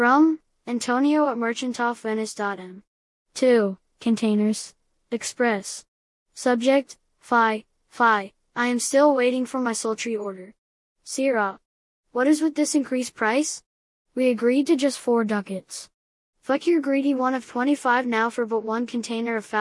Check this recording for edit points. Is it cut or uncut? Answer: uncut